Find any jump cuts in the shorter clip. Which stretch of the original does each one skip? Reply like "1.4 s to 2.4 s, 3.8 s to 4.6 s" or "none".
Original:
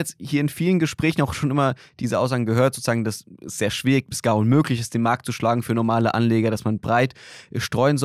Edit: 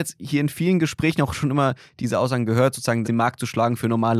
3.0 s to 4.9 s